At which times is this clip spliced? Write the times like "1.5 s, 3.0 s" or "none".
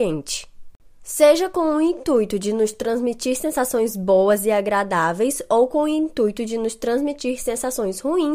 none